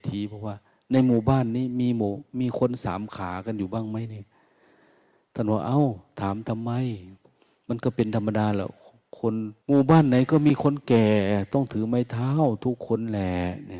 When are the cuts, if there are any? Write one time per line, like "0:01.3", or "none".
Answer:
0:09.6